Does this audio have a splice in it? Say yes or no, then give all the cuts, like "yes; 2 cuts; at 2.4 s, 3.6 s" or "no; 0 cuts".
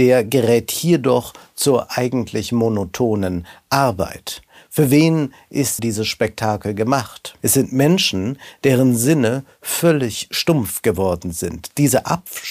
yes; 2 cuts; at 5.8 s, 7.4 s